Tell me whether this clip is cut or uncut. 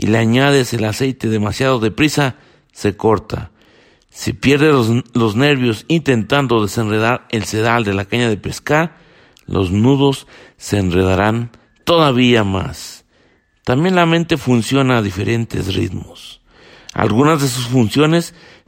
uncut